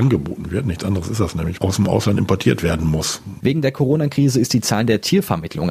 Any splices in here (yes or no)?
yes